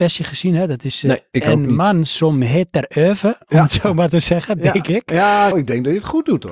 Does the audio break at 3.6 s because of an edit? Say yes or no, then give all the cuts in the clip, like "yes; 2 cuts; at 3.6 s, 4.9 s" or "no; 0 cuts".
no; 1 cut; at 5.5 s